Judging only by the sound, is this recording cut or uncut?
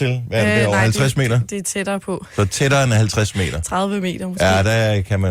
uncut